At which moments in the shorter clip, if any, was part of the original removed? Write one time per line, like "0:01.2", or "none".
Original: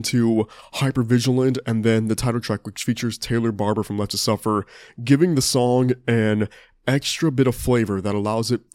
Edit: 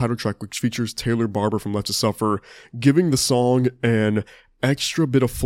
none